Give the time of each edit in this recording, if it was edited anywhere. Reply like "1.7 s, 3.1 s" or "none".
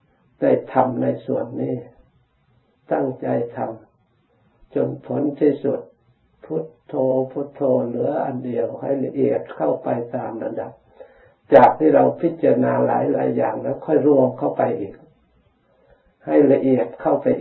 none